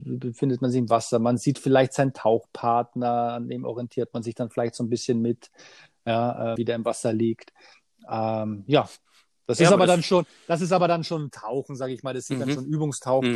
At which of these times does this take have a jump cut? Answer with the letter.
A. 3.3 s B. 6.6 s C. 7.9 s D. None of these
B